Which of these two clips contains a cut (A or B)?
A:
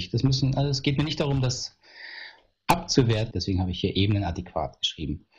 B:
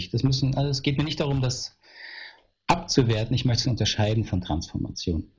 A